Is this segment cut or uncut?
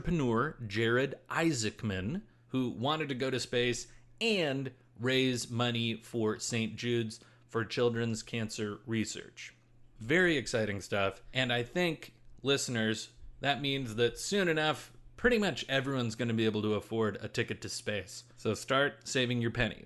cut